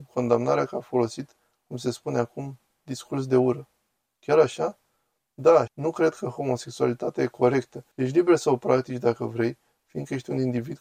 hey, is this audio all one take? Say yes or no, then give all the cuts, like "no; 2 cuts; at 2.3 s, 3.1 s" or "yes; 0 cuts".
no; 2 cuts; at 5.7 s, 7.9 s